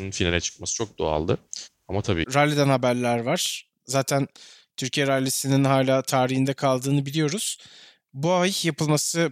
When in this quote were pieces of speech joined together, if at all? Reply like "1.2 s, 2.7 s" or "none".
2.2 s